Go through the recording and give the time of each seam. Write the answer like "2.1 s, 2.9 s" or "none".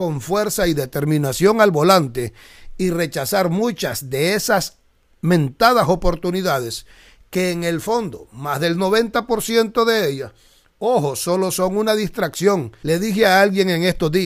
12.8 s